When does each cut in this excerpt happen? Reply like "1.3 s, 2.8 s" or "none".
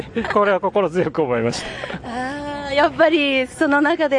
none